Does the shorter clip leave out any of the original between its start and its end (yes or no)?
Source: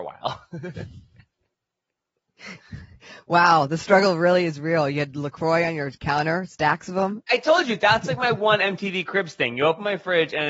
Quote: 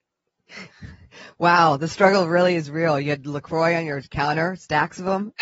no